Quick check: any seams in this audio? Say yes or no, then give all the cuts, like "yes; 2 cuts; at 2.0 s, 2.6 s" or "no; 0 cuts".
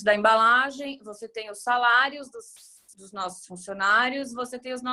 no; 0 cuts